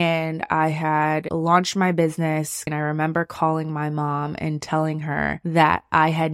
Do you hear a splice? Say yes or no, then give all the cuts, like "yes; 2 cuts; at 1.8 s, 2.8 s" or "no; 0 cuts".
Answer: yes; 1 cut; at 2.7 s